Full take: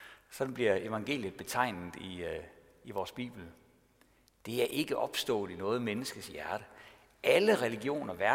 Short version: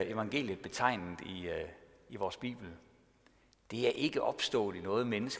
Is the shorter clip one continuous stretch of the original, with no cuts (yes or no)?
yes